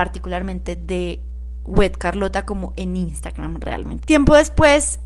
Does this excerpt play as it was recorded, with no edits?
no; 1 cut; at 4.0 s

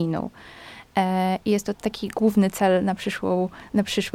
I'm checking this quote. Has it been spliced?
yes; 1 cut; at 1.7 s

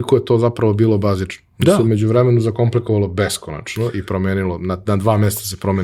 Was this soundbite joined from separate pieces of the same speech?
no; 0 cuts

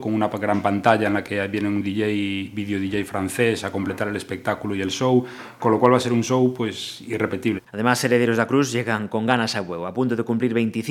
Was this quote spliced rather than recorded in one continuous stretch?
yes; 2 cuts; at 7.6 s, 9.1 s

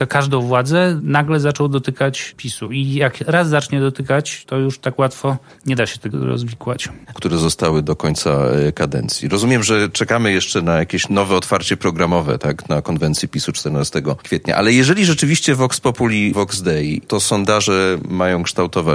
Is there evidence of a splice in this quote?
yes; 1 cut; at 7.1 s

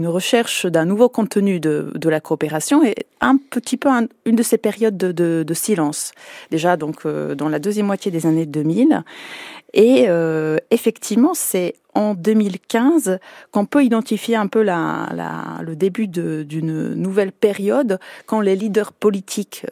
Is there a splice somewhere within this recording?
no; 0 cuts

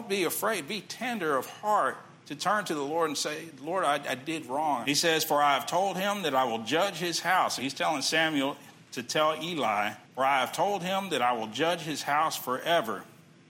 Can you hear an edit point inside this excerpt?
yes; 3 cuts; at 4.8 s, 7.6 s, 10.0 s

